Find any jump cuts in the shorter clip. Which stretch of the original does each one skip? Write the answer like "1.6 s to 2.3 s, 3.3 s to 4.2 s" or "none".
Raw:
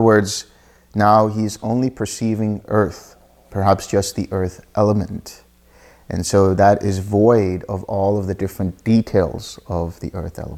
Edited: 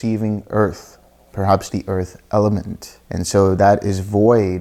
3.9 s to 4.1 s, 5.5 s to 6.0 s